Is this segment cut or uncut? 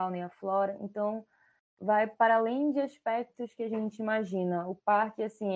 uncut